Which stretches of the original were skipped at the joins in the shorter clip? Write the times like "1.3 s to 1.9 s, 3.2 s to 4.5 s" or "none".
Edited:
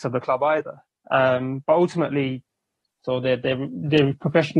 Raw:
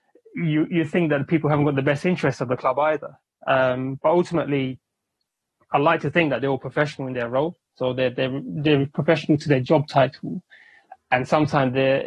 5.3 s to 7.7 s

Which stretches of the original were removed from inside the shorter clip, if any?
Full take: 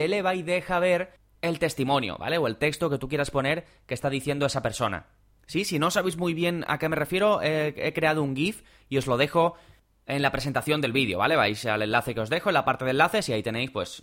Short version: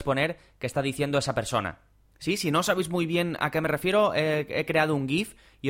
none

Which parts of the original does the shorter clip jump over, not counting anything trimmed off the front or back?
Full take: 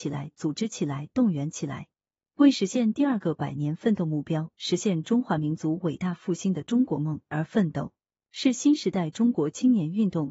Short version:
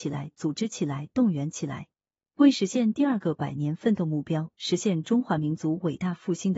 none

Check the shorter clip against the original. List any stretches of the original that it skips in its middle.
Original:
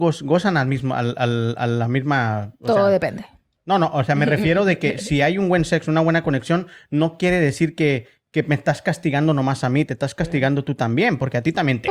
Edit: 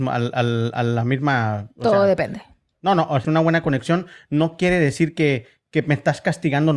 4.1 s to 5.9 s

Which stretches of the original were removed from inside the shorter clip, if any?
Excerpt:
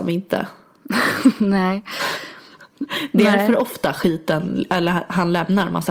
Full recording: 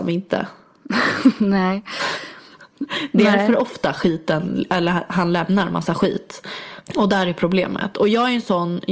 none

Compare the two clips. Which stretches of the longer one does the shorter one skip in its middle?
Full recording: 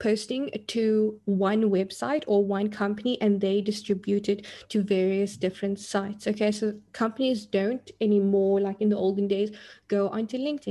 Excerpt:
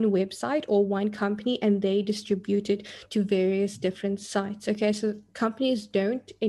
none

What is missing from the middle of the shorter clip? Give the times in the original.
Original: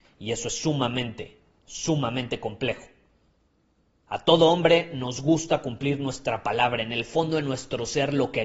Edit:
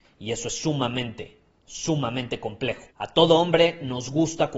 2.9 s to 4.0 s

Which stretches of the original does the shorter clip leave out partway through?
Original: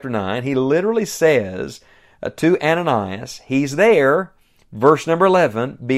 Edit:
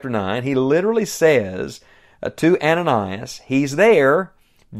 none

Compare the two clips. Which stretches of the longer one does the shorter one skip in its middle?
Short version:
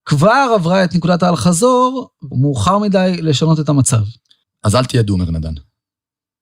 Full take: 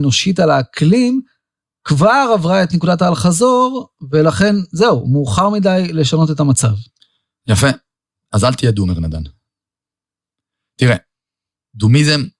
4.1 s to 5.0 s, 7.1 s to 8.1 s

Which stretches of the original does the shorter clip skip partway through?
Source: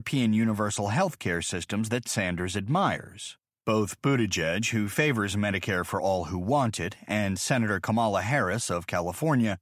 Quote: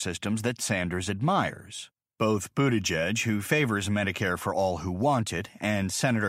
none

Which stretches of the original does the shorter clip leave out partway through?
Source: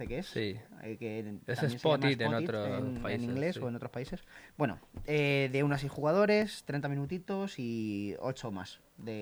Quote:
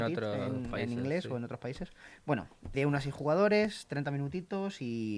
5.1 s to 5.5 s

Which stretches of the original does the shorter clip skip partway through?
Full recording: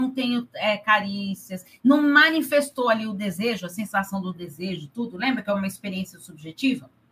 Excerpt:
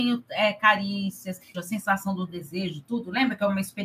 1.8 s to 3.6 s

